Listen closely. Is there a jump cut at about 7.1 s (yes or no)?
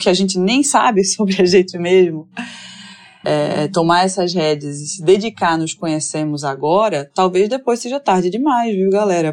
no